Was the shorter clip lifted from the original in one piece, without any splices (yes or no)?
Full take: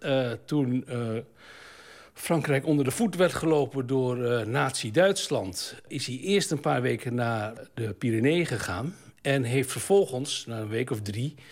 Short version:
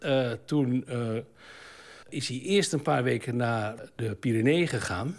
no